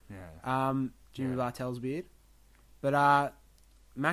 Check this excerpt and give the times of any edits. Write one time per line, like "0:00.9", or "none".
0:01.1